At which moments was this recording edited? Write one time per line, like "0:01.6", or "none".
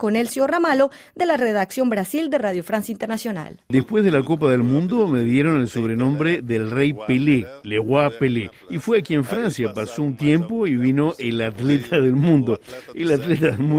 0:03.7